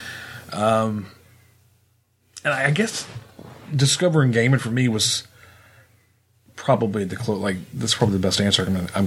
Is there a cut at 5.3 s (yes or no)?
no